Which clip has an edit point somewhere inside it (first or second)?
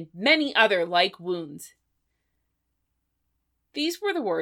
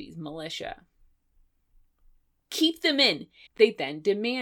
second